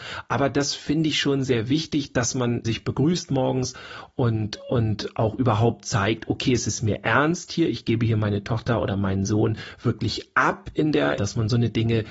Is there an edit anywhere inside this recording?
yes; 2 cuts; at 2.6 s, 11.2 s

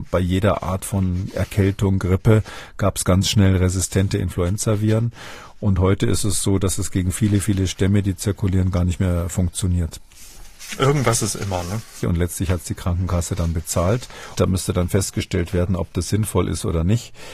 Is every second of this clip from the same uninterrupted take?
no; 2 cuts; at 12.0 s, 14.3 s

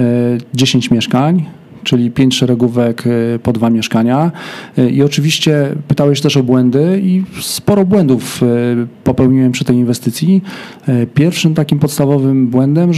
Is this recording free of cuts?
yes; 0 cuts

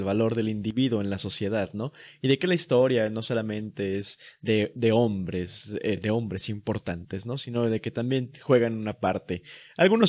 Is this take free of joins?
yes; 0 cuts

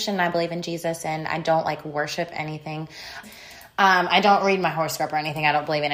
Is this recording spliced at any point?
yes; 1 cut; at 3.2 s

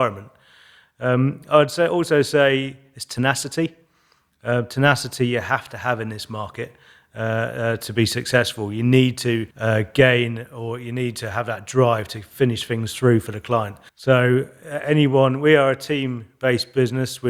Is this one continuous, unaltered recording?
no; 2 cuts; at 9.5 s, 13.9 s

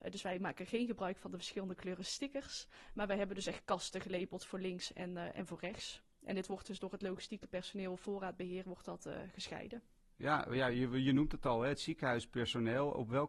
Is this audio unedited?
yes; 0 cuts

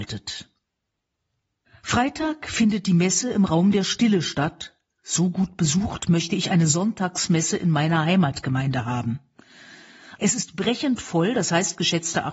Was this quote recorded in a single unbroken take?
no; 1 cut; at 10.2 s

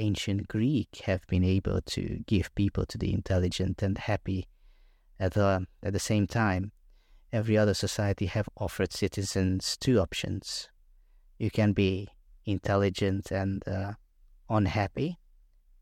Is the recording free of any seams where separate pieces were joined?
yes; 0 cuts

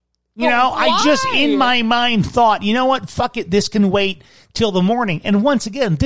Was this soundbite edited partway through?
no; 0 cuts

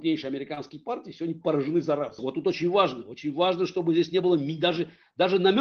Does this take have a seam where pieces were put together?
yes; 1 cut; at 2.2 s

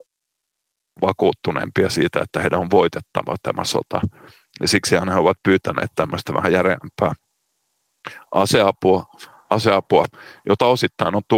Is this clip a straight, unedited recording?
yes; 0 cuts

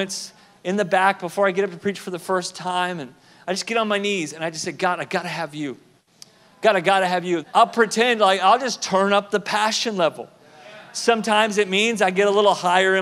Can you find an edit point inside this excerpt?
yes; 1 cut; at 7.4 s

